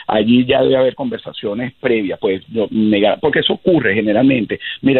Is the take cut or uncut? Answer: uncut